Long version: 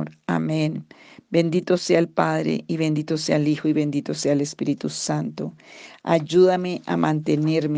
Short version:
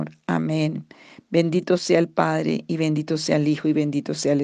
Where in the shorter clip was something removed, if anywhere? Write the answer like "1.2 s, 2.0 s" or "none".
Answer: none